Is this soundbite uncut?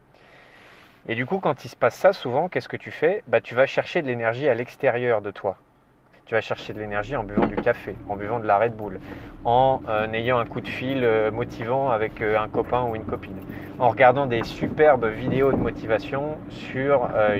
no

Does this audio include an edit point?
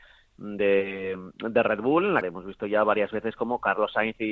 yes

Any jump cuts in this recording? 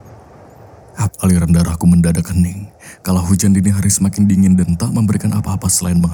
yes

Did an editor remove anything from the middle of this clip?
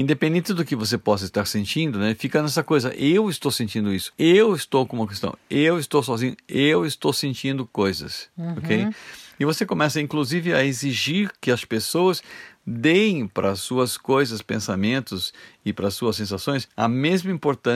no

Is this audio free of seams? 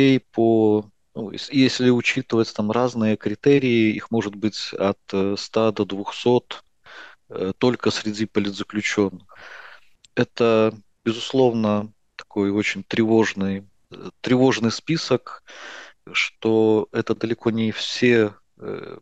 no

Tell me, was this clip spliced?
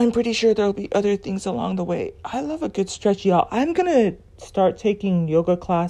no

